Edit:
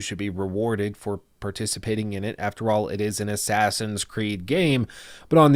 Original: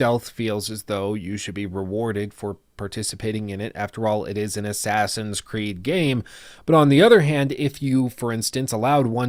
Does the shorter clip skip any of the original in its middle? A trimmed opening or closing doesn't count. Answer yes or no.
no